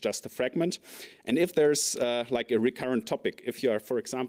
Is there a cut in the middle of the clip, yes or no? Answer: no